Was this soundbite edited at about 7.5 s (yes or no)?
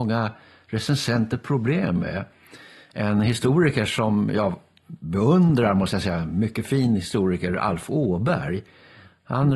no